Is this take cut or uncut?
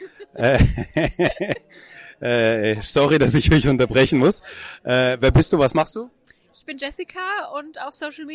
uncut